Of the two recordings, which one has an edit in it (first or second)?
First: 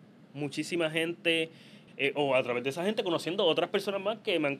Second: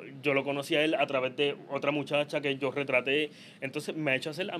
first